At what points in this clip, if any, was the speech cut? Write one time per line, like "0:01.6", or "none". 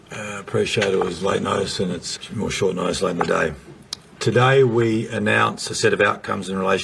0:02.2